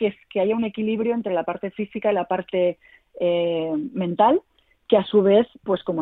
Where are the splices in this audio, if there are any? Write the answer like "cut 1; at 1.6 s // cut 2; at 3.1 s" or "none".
none

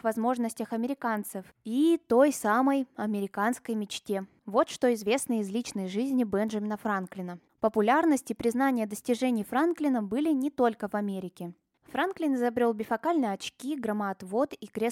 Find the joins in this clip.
cut 1; at 7.5 s // cut 2; at 11.8 s

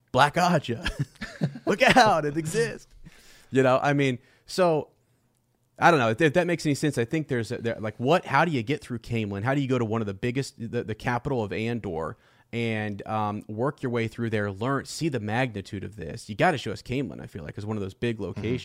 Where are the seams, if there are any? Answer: none

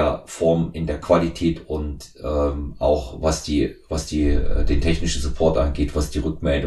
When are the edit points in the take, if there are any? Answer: none

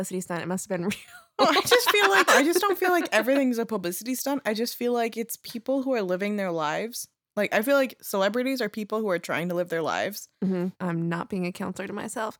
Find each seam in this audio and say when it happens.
cut 1; at 2.3 s // cut 2; at 10.7 s

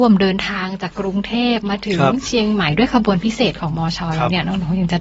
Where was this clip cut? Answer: cut 1; at 0.9 s

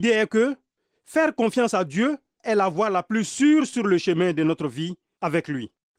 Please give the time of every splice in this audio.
cut 1; at 2.4 s

